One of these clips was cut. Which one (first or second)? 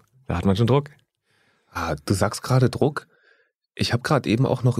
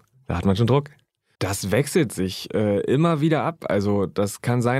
second